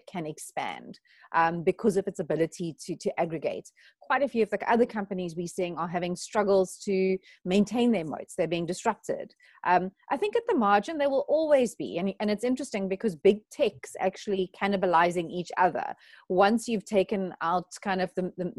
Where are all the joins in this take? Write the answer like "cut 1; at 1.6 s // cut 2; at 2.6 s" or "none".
none

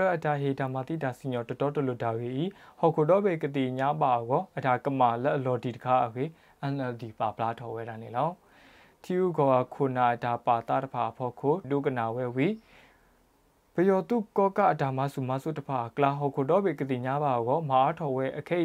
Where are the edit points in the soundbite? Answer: cut 1; at 11.6 s

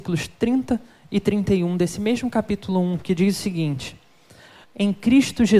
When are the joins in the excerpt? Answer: cut 1; at 4.6 s

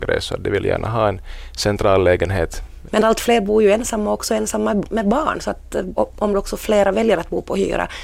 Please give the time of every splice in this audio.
cut 1; at 2.9 s // cut 2; at 5.9 s

